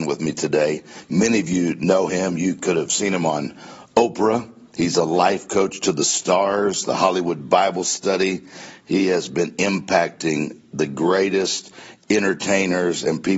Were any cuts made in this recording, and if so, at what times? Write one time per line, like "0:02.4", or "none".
none